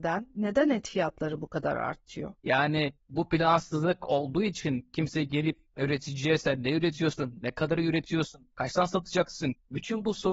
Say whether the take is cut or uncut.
cut